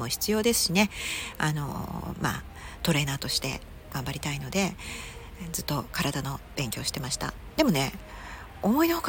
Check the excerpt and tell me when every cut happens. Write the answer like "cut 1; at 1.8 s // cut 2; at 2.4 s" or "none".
none

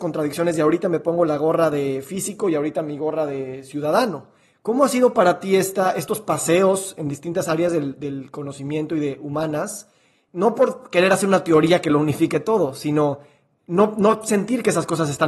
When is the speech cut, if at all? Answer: none

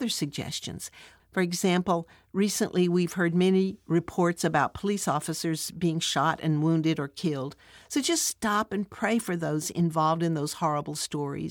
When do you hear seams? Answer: cut 1; at 1.2 s

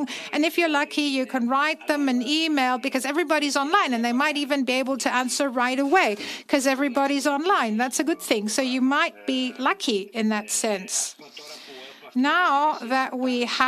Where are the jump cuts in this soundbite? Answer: none

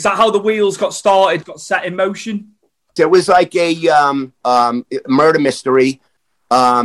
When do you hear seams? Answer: cut 1; at 1.4 s // cut 2; at 3.0 s // cut 3; at 4.4 s

